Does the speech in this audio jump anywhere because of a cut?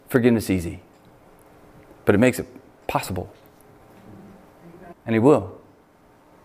yes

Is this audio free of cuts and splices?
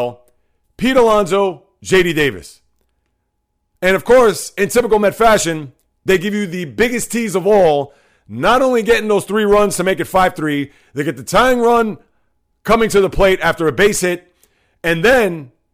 yes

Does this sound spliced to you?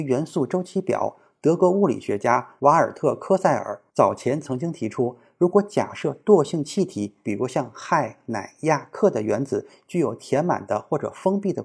no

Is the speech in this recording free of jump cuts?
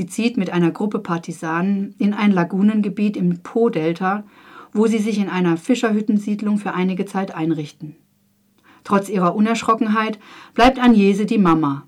yes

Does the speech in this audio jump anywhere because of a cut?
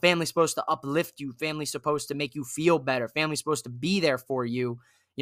no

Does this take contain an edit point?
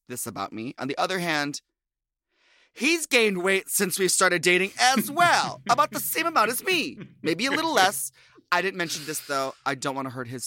no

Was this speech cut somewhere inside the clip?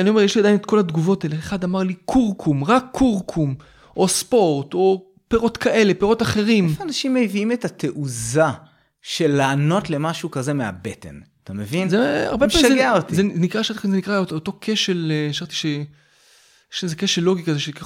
no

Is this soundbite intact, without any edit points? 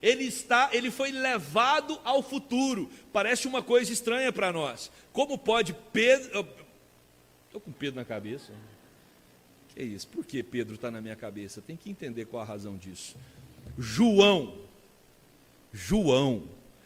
yes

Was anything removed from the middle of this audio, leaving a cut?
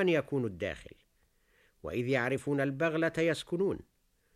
no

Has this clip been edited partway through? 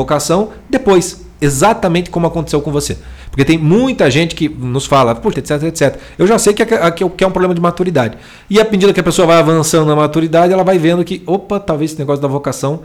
yes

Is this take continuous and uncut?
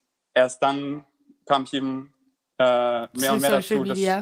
yes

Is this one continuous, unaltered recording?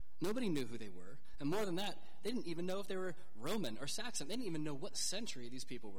yes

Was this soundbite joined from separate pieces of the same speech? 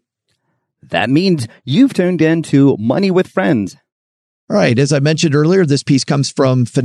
no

